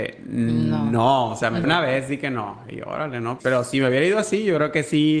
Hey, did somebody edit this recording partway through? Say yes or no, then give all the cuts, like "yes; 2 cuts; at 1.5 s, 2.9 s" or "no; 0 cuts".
yes; 2 cuts; at 1.6 s, 3.4 s